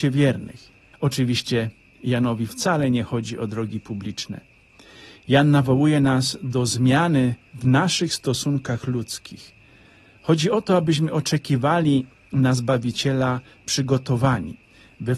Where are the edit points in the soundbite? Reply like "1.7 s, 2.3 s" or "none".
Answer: 0.9 s